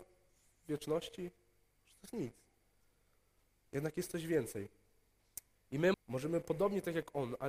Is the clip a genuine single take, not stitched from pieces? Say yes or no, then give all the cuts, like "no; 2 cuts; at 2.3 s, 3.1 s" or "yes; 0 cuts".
no; 1 cut; at 5.9 s